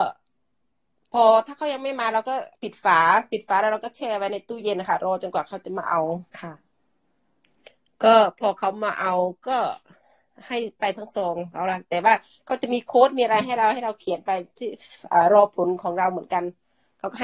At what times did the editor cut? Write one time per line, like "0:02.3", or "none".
0:02.5
0:06.3